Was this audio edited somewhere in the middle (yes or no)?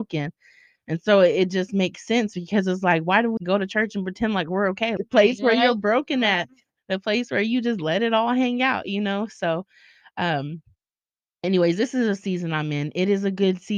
yes